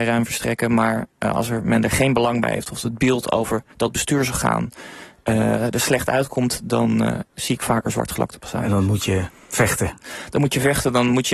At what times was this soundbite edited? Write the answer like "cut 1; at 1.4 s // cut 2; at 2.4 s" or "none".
none